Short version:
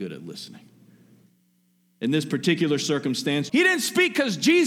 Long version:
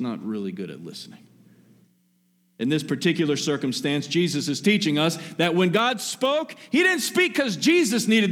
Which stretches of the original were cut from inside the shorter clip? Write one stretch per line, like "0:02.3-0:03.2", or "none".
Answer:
0:04.1-0:06.7